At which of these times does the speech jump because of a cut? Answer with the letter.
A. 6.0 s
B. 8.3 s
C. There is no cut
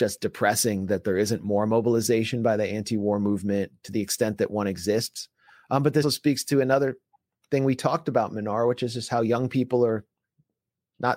A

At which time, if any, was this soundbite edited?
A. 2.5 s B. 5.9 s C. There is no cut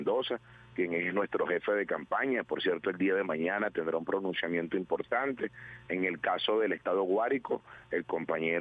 B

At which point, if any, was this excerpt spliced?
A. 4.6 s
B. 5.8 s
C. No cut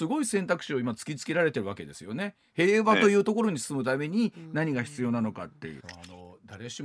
B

